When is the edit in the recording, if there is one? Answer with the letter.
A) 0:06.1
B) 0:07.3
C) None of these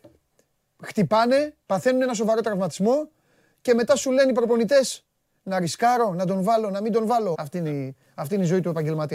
B